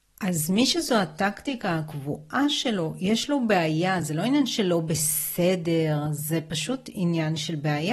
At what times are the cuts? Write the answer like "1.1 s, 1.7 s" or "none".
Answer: none